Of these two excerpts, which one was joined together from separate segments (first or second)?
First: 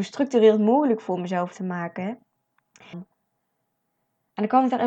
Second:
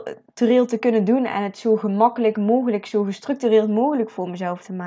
first